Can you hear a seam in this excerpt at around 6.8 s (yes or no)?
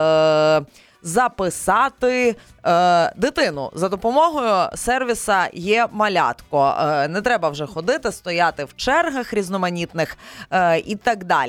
no